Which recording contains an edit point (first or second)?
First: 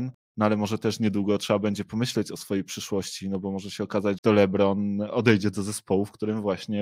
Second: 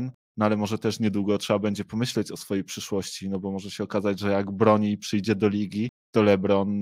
first